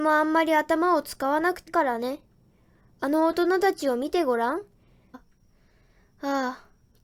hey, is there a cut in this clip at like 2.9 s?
no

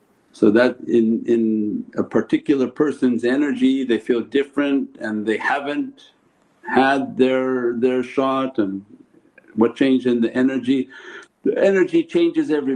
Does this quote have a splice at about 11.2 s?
yes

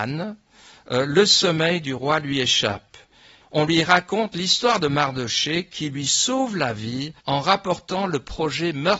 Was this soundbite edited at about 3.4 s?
yes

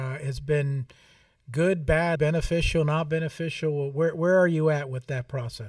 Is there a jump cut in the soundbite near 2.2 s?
yes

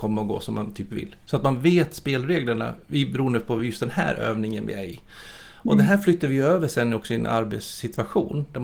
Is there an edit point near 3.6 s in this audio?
no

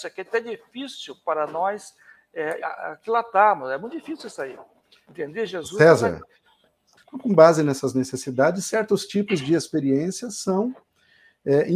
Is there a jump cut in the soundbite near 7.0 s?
yes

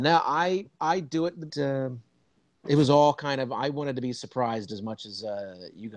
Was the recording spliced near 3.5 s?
no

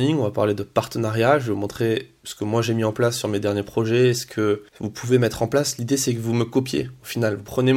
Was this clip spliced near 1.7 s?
no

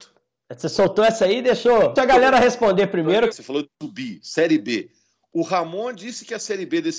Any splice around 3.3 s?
yes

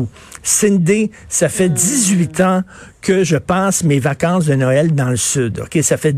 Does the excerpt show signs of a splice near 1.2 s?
no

